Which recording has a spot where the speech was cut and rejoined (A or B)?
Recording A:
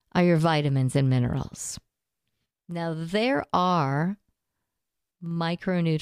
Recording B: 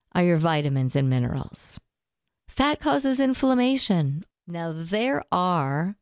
B